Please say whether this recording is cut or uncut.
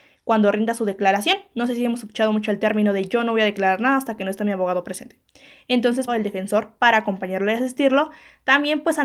cut